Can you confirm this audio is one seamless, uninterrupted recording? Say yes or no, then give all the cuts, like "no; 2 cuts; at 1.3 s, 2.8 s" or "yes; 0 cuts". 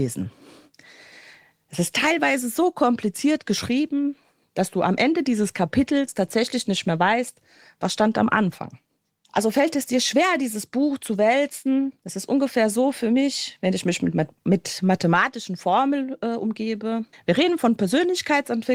no; 1 cut; at 17.1 s